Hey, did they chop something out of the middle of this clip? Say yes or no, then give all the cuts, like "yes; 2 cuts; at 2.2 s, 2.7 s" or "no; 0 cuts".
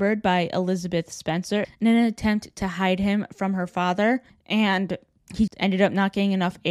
yes; 2 cuts; at 4.3 s, 5.5 s